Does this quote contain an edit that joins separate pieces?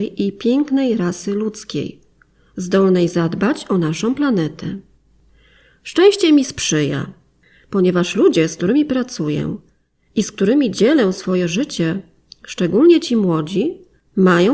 no; 0 cuts

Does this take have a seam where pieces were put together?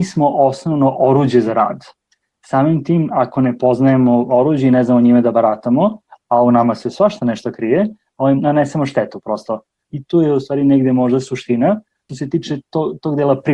yes; 1 cut; at 8.4 s

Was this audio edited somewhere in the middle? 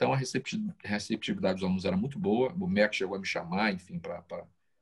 no; 0 cuts

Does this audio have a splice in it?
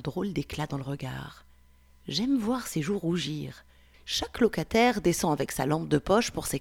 yes; 1 cut; at 3.9 s

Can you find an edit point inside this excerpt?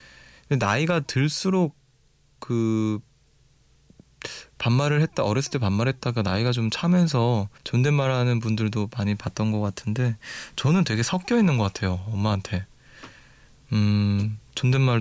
yes; 1 cut; at 7.6 s

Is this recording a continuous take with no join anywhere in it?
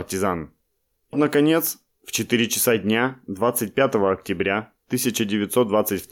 no; 1 cut; at 1.1 s

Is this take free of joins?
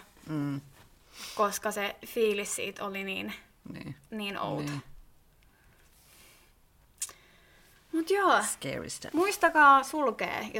yes; 0 cuts

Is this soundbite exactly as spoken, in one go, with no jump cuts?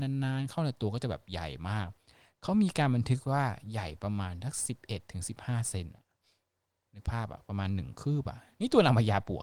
yes; 0 cuts

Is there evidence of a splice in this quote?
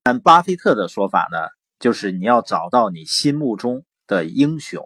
no; 0 cuts

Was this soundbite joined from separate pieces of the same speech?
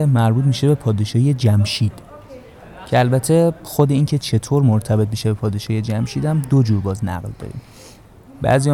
no; 0 cuts

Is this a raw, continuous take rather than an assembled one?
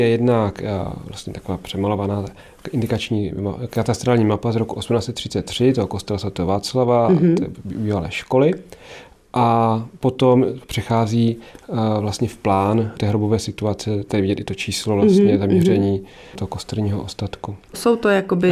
yes; 0 cuts

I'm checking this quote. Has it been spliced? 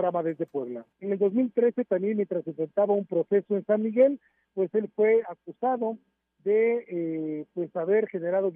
yes; 1 cut; at 0.9 s

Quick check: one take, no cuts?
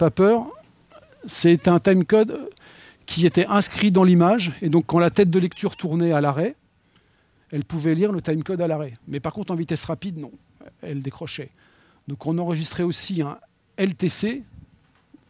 no; 1 cut; at 9.0 s

